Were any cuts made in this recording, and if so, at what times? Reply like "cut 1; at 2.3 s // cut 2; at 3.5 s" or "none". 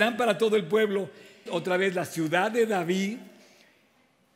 cut 1; at 1.5 s